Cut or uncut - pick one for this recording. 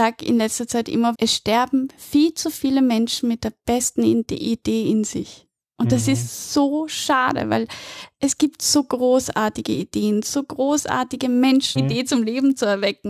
cut